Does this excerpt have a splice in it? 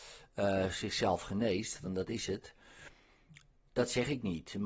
no; 0 cuts

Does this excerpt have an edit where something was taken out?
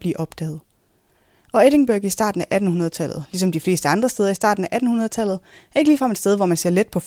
no; 0 cuts

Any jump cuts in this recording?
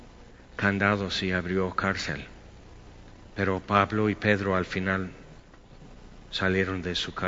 yes; 1 cut; at 3.3 s

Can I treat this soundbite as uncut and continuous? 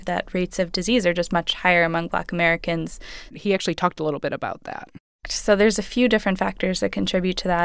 no; 2 cuts; at 3.3 s, 5.2 s

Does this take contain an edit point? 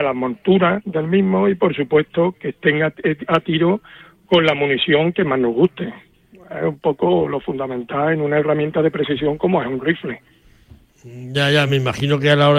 no; 0 cuts

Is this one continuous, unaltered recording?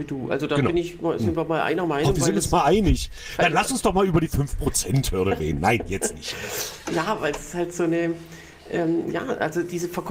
yes; 0 cuts

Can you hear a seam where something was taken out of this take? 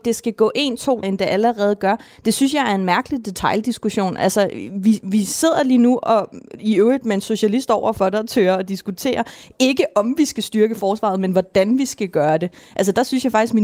yes; 1 cut; at 1.0 s

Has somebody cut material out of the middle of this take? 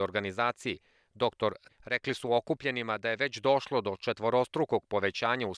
yes; 1 cut; at 1.7 s

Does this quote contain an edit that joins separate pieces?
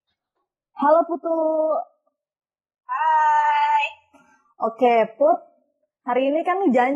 no; 0 cuts

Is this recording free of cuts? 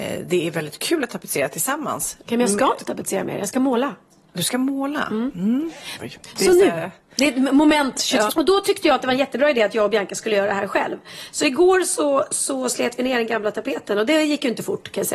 no; 2 cuts; at 6.0 s, 8.3 s

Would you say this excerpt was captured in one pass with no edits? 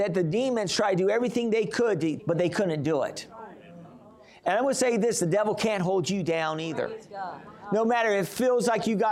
no; 1 cut; at 2.2 s

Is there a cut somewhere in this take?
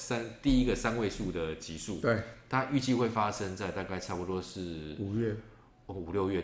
no; 0 cuts

